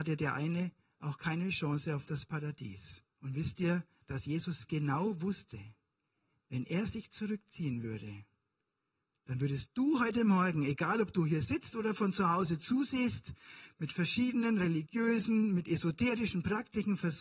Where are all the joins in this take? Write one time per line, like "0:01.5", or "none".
0:03.1